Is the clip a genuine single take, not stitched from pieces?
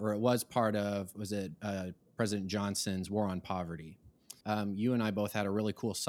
no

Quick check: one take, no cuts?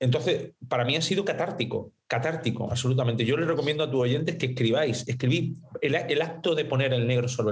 yes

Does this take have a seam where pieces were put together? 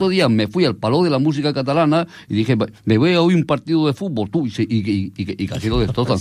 no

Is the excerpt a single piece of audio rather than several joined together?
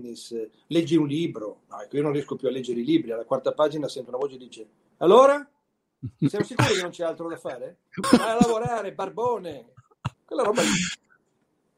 no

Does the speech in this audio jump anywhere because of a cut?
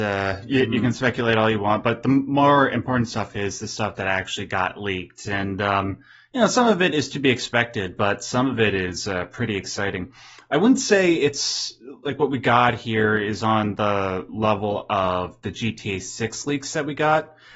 no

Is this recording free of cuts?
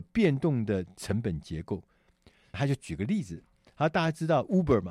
no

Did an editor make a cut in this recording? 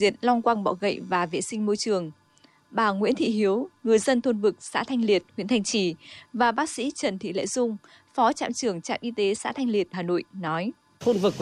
yes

